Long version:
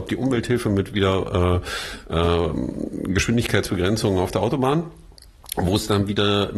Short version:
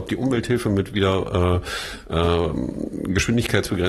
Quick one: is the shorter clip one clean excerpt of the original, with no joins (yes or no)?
yes